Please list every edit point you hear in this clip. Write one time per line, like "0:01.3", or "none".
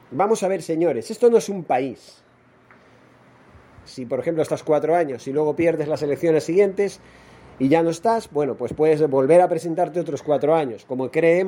0:03.9